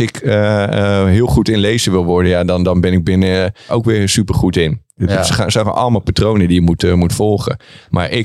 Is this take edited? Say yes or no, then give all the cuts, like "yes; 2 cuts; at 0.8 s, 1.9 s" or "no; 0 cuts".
yes; 1 cut; at 3.7 s